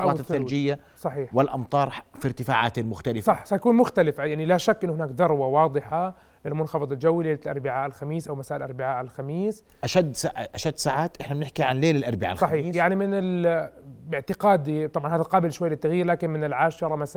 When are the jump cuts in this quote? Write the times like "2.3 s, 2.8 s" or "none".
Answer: none